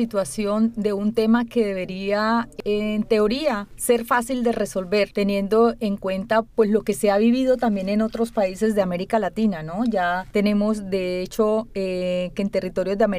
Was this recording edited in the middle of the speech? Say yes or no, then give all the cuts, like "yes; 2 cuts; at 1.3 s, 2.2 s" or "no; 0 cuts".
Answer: no; 0 cuts